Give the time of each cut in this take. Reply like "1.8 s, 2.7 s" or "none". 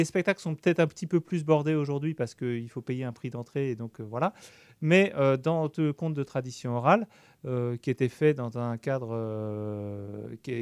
none

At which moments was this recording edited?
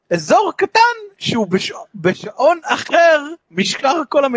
3.4 s

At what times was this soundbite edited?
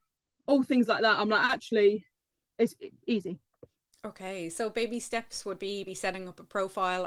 2.4 s, 5.9 s

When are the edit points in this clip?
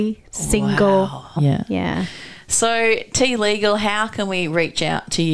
1.4 s

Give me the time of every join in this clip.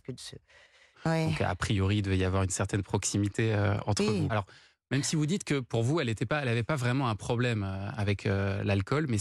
0.9 s, 4.3 s

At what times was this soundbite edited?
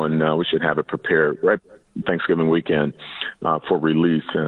2.0 s

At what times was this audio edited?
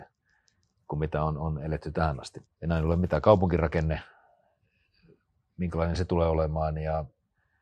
2.4 s

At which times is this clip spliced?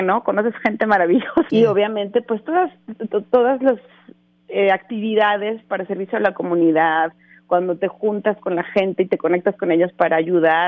1.5 s

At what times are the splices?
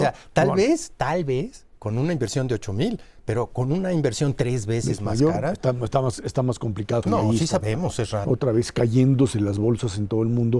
7.0 s, 8.2 s

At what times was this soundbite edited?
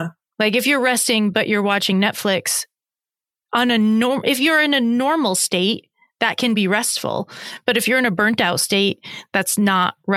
none

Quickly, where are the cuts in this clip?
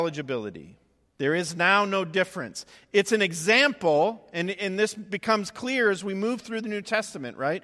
1.1 s

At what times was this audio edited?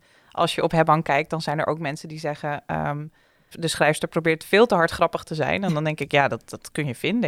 3.5 s

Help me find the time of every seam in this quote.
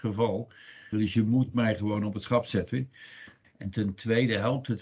0.9 s, 3.4 s

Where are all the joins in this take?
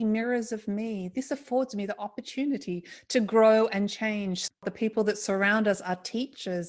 none

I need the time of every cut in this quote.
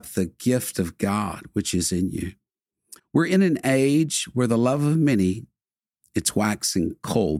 3.0 s

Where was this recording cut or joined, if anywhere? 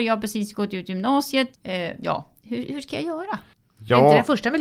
1.5 s

